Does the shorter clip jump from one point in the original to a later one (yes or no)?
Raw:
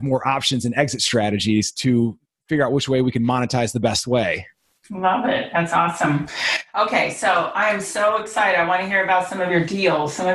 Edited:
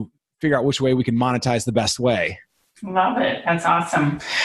no